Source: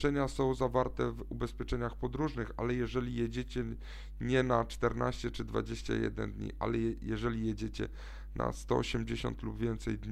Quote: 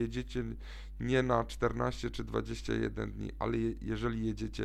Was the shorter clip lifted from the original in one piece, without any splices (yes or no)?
yes